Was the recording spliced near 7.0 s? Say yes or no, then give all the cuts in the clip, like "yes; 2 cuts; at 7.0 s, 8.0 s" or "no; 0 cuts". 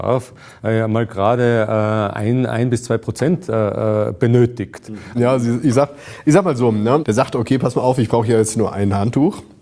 yes; 2 cuts; at 5.1 s, 7.0 s